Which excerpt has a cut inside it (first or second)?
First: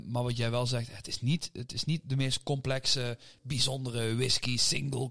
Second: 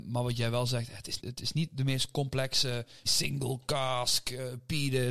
second